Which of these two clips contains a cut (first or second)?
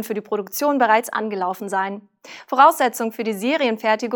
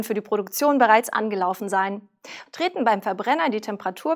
second